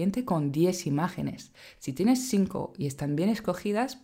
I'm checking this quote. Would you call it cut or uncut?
uncut